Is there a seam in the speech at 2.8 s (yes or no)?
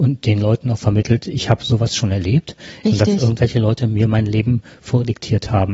yes